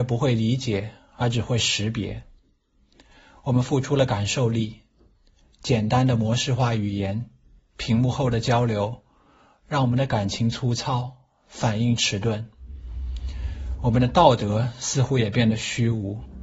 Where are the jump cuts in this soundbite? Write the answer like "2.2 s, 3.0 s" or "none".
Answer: none